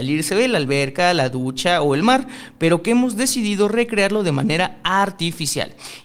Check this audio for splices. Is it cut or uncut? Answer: uncut